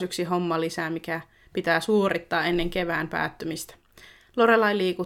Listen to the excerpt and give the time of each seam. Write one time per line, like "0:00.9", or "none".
none